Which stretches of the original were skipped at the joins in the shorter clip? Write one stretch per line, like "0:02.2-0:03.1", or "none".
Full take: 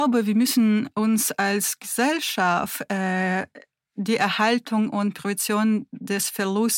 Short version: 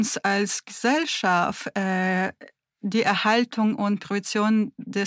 none